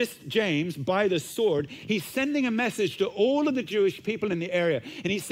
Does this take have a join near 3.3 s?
no; 0 cuts

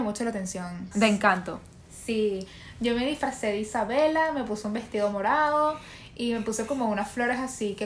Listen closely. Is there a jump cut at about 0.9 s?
yes; 1 cut; at 0.9 s

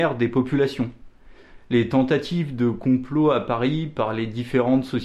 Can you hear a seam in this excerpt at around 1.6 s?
no; 0 cuts

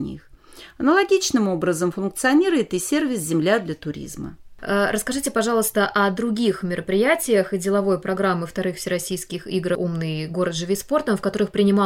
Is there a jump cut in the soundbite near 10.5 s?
no; 1 cut; at 4.6 s

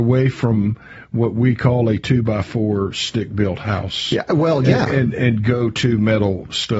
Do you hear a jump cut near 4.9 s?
no; 0 cuts

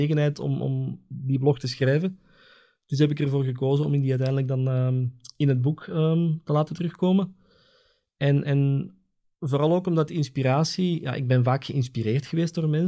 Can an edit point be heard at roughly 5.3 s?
no; 0 cuts

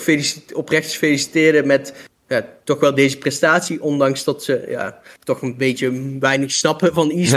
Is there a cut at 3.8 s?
no; 0 cuts

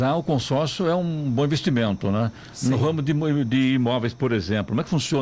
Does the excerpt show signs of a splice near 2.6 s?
no; 0 cuts

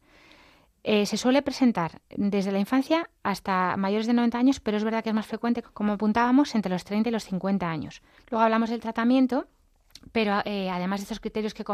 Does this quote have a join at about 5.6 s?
yes; 2 cuts; at 5.6 s, 8.2 s

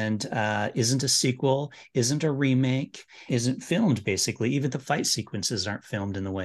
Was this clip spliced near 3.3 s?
yes; 1 cut; at 3.3 s

